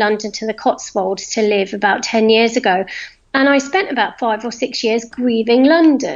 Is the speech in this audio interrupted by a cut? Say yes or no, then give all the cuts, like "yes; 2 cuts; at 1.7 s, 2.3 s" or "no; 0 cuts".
no; 0 cuts